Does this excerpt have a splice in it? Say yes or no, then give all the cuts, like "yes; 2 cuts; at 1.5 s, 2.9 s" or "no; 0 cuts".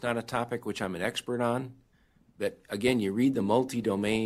no; 0 cuts